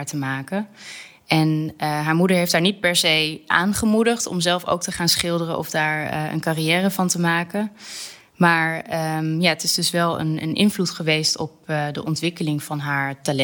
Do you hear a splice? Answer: no; 0 cuts

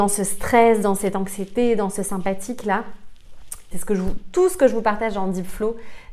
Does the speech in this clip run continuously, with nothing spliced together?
no; 1 cut; at 3.7 s

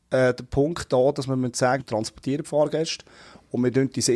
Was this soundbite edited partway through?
yes; 1 cut; at 1.8 s

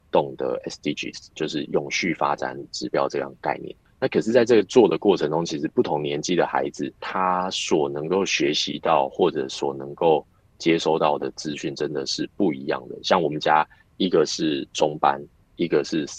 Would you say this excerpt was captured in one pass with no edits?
yes; 0 cuts

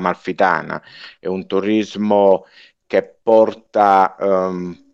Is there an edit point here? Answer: no; 0 cuts

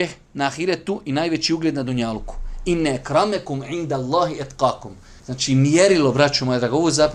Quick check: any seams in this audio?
yes; 1 cut; at 5.2 s

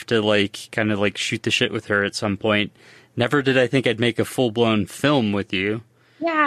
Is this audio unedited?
yes; 0 cuts

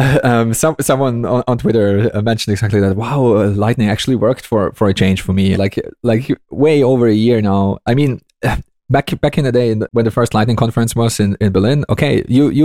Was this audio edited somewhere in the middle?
yes; 2 cuts; at 5.5 s, 9.9 s

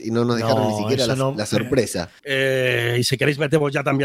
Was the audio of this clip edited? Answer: yes; 1 cut; at 2.2 s

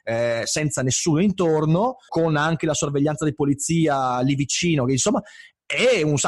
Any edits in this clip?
yes; 1 cut; at 2.1 s

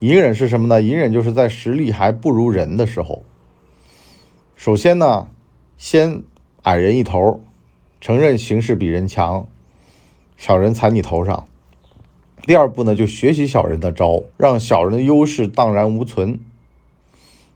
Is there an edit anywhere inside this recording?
yes; 2 cuts; at 12.5 s, 14.3 s

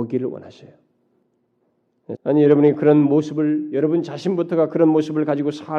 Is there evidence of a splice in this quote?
yes; 1 cut; at 2.2 s

